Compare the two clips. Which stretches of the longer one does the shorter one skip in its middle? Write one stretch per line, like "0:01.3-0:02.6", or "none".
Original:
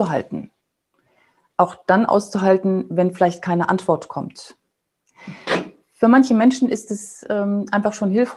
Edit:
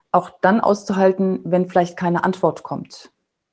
none